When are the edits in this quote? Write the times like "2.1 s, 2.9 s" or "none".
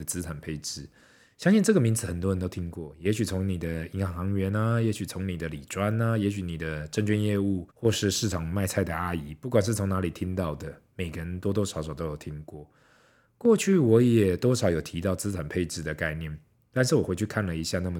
7.7 s